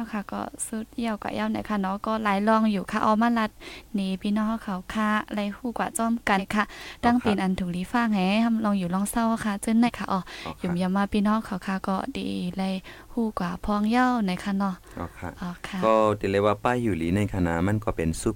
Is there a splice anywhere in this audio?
yes; 2 cuts; at 6.4 s, 9.9 s

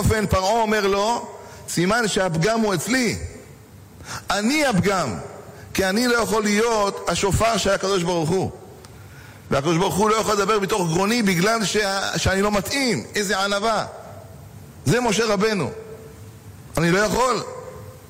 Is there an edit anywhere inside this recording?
no; 0 cuts

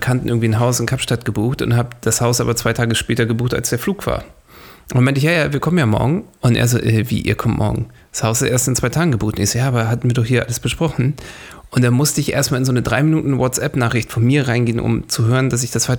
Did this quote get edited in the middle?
no; 0 cuts

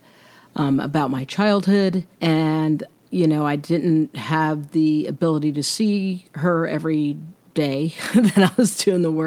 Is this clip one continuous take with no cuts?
no; 1 cut; at 2.1 s

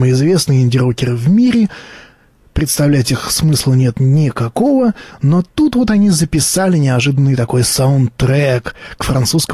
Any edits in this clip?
no; 0 cuts

